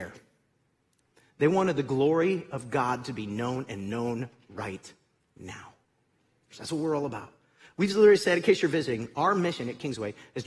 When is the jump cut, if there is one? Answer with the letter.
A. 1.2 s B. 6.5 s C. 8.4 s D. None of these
B